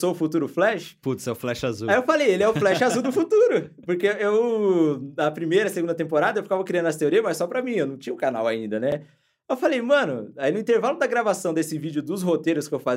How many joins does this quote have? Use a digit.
0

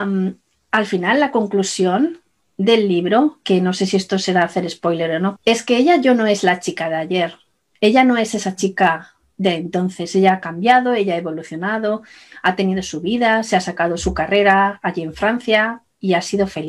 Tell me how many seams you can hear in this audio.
1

